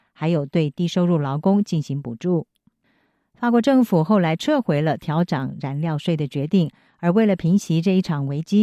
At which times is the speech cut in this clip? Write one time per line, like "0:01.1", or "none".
none